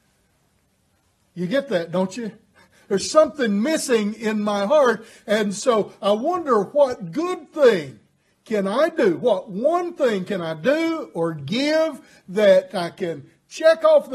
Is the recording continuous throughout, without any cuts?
yes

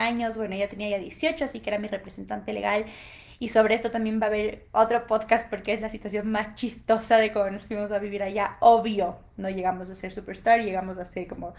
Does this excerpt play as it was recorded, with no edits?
yes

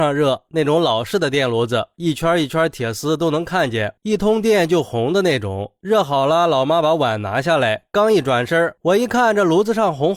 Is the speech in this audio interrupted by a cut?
no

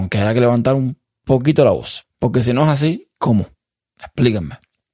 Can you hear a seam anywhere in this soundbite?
yes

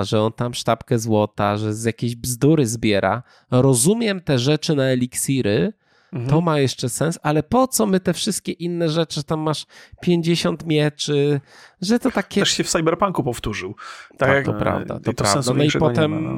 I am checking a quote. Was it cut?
yes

